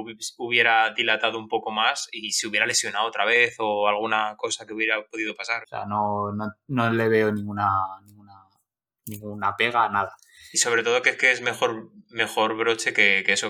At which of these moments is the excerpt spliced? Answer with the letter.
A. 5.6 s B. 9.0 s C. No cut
A